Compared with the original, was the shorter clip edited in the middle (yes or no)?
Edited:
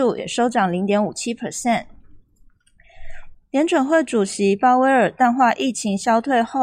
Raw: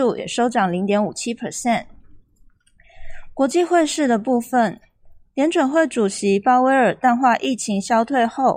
yes